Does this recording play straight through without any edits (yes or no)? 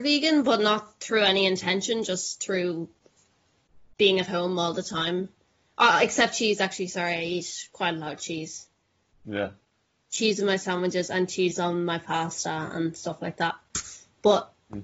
yes